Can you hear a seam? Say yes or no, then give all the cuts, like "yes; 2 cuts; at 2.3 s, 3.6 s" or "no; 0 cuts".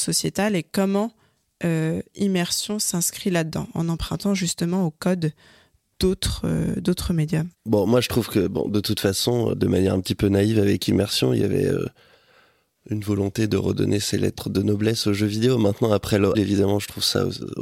yes; 3 cuts; at 7.5 s, 9.5 s, 16.3 s